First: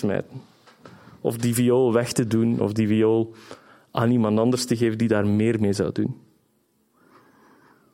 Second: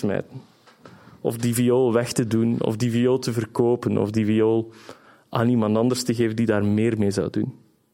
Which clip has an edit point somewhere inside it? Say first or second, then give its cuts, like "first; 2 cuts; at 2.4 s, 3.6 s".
first; 1 cut; at 2.6 s